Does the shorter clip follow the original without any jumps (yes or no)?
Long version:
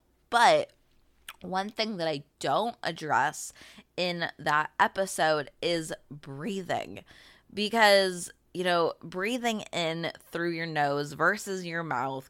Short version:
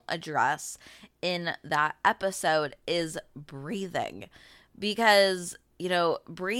yes